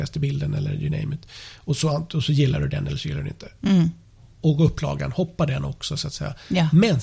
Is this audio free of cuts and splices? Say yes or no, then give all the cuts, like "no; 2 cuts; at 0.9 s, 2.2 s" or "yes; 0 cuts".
yes; 0 cuts